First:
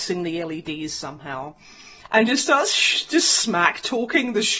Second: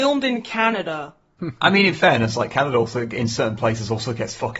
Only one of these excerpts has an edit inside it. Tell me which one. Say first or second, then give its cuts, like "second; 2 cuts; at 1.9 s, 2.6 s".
second; 1 cut; at 1.4 s